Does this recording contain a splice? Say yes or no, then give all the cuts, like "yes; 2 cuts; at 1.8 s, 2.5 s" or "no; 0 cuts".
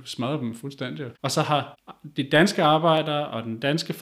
yes; 1 cut; at 1.1 s